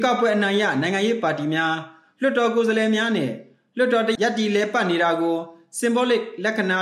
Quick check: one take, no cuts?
no; 1 cut; at 4.2 s

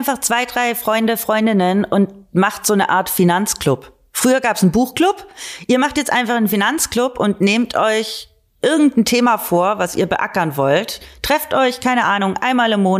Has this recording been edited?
no; 0 cuts

